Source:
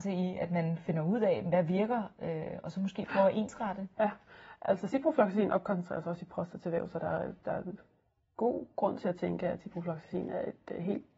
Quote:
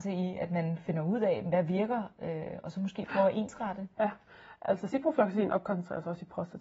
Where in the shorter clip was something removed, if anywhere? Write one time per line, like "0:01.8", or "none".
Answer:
none